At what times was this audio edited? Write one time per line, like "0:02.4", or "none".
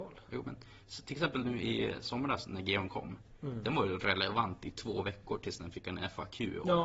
none